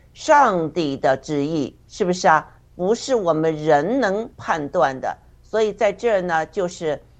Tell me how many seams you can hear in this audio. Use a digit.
1